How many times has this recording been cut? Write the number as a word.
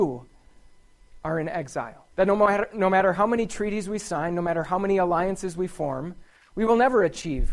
one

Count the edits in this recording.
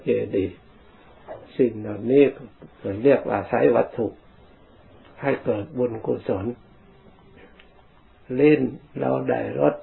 one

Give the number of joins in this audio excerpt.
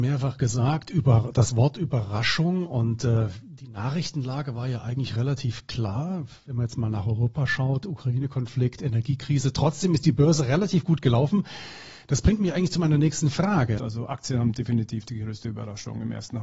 one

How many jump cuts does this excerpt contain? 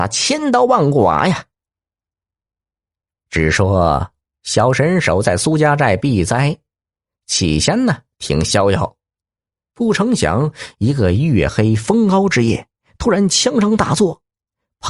zero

